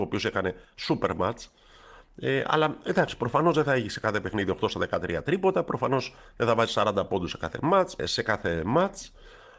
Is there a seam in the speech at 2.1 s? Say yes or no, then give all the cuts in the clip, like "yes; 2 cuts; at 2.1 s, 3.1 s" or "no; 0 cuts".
no; 1 cut; at 8.0 s